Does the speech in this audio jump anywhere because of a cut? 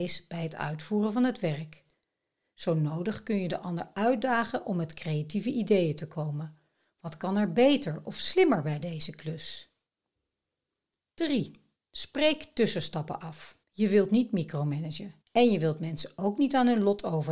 yes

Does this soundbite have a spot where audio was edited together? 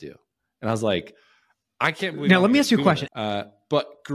yes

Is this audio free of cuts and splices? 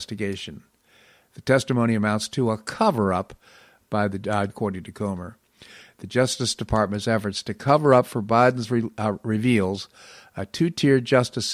no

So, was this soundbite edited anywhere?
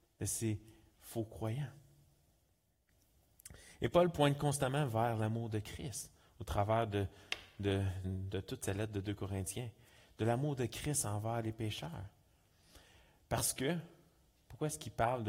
yes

